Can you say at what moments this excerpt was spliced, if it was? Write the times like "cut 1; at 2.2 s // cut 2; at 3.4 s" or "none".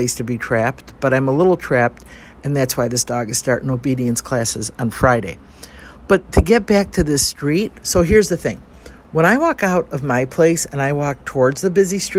none